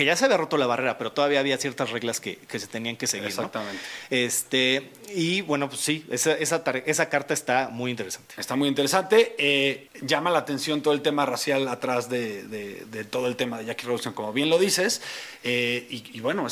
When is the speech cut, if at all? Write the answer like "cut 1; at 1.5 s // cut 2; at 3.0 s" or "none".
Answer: cut 1; at 9.9 s